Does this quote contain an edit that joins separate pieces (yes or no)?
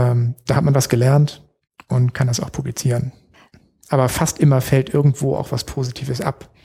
yes